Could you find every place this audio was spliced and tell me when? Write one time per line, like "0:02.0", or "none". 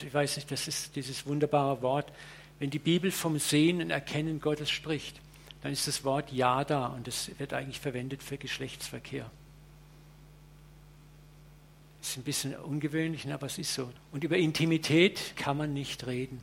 0:14.0
0:15.4